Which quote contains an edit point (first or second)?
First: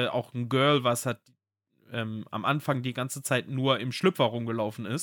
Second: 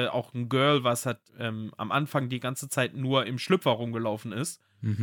second